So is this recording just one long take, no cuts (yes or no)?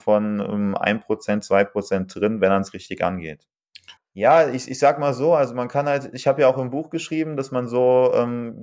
no